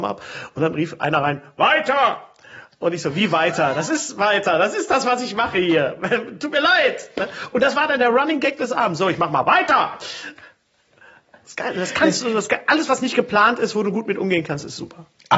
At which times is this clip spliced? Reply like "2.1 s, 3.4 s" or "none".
none

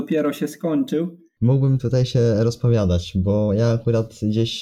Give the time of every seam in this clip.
1.4 s

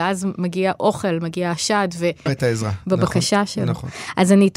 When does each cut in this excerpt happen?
2.3 s

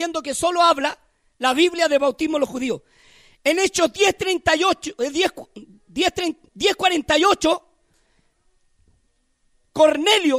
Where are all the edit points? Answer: 6.5 s

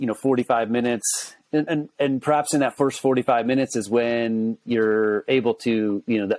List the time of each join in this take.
none

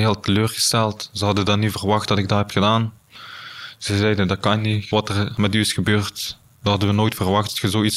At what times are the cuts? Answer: none

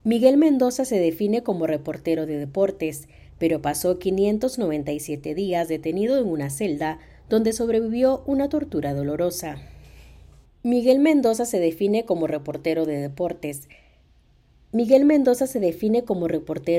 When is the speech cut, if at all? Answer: 10.4 s

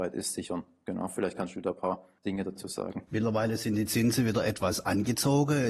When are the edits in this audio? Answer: 3.1 s

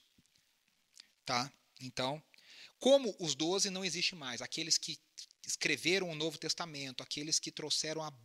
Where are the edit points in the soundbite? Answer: none

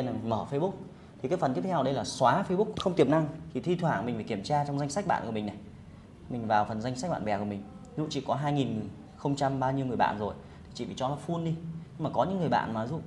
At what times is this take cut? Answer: 2.7 s

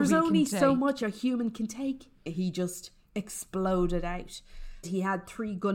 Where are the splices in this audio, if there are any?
2.3 s, 4.8 s

